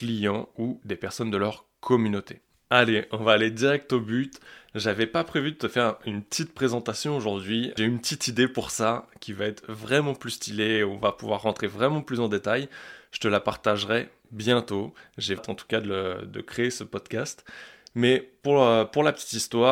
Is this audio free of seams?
no; 1 cut; at 15.4 s

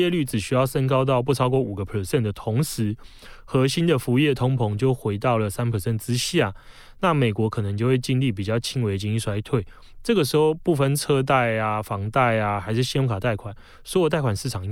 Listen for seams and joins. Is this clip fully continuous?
yes; 0 cuts

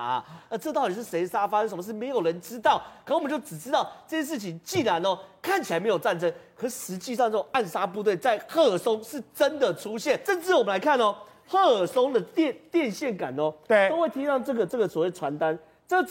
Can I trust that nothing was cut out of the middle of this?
yes; 0 cuts

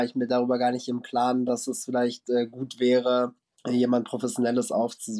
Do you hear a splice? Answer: no; 0 cuts

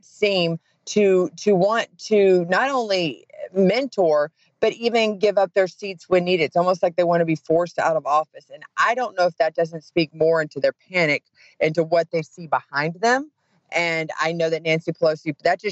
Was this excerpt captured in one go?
yes; 0 cuts

